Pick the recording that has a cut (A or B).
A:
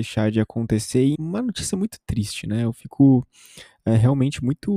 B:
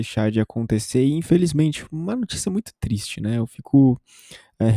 A